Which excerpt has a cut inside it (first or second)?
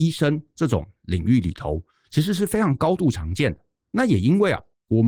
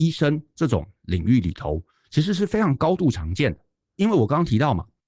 first